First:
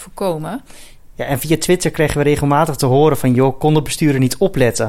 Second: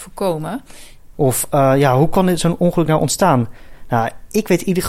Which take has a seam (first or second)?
second